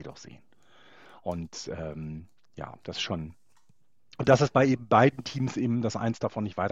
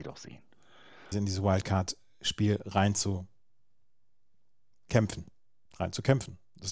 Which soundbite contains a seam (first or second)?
second